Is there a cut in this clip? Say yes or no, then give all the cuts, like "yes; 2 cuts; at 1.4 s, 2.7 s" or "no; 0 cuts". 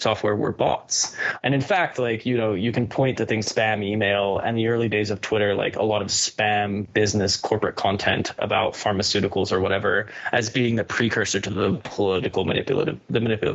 yes; 2 cuts; at 1.4 s, 3.4 s